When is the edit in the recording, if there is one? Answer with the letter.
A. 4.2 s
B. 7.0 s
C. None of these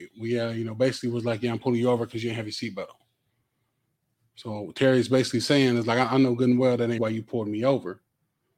B